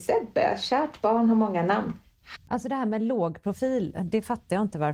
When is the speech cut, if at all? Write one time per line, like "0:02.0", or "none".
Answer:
0:02.4